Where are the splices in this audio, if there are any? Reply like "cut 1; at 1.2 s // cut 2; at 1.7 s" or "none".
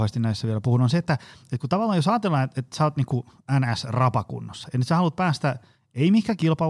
none